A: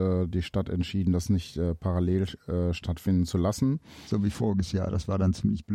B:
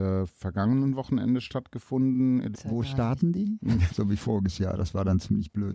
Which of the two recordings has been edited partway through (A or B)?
B